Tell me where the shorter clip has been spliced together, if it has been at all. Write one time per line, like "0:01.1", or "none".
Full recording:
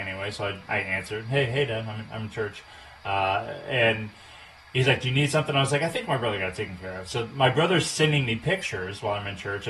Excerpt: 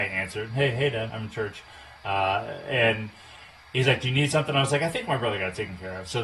0:01.1